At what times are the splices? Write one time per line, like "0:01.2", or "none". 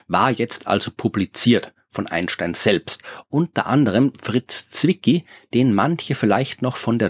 0:03.2

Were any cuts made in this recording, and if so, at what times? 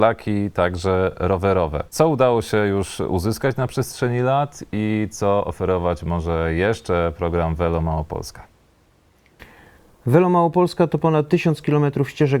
0:01.9

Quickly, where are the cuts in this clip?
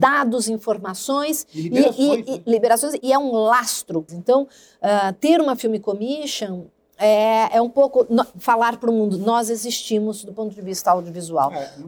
0:03.0
0:04.1

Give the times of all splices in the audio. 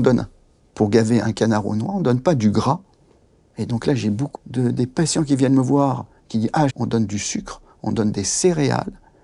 0:04.3
0:06.7

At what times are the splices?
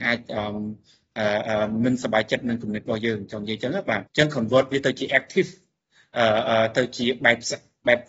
0:04.1

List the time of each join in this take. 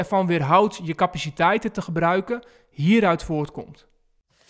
none

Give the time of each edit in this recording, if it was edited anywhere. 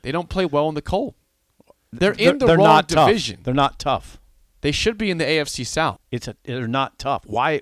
0:06.0

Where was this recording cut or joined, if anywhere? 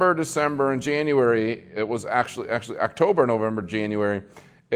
0:03.6

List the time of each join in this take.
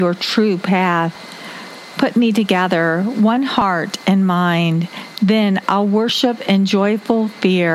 0:05.6

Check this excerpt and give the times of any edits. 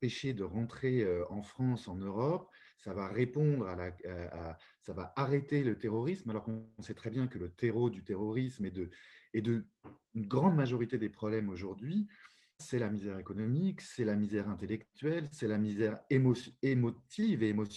0:12.6

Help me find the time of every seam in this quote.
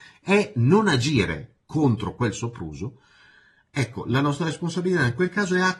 0:01.6

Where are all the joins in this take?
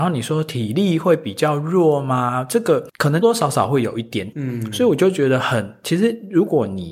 0:03.2
0:04.3

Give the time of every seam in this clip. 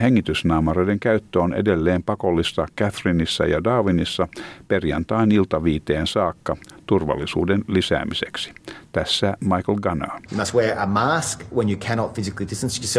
0:10.3

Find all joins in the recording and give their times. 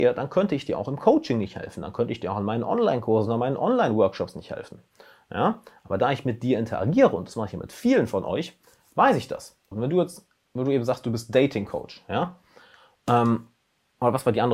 0:09.7

